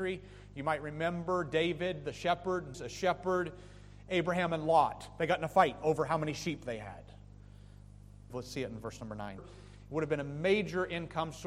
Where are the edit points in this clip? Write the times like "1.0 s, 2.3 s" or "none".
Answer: 2.7 s, 8.3 s, 9.4 s